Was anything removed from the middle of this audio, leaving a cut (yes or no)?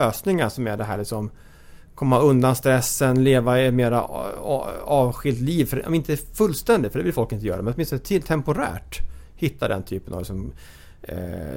no